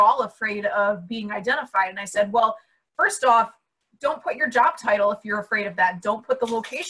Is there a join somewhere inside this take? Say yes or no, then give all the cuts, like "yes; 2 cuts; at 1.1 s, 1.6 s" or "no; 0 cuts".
no; 0 cuts